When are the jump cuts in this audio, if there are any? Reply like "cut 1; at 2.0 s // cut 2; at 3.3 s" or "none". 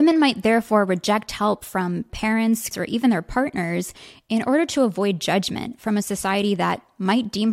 cut 1; at 2.7 s